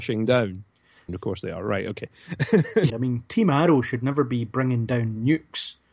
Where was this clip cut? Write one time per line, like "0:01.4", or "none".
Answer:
0:01.1
0:02.9